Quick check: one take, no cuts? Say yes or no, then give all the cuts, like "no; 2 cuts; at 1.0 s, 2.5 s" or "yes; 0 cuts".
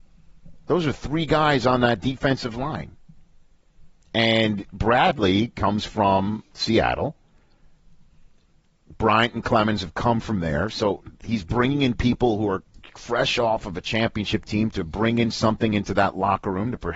yes; 0 cuts